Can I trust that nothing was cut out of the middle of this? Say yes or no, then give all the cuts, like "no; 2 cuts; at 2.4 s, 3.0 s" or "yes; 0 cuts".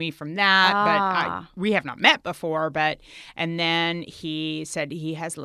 yes; 0 cuts